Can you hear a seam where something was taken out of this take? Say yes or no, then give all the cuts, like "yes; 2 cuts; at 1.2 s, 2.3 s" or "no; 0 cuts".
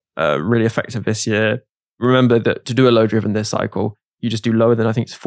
no; 0 cuts